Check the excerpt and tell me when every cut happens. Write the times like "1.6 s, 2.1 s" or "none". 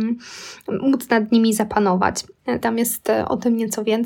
2.6 s